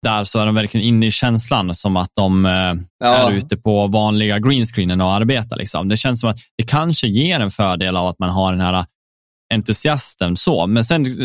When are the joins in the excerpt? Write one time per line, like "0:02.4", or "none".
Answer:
0:02.9

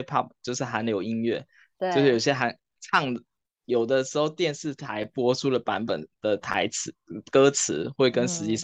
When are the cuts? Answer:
none

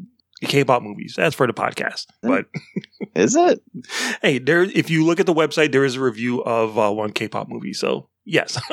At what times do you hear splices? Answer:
0:02.2

